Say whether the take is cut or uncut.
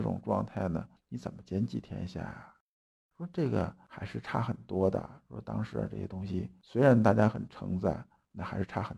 uncut